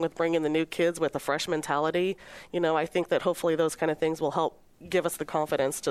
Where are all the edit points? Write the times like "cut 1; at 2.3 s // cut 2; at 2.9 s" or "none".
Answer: none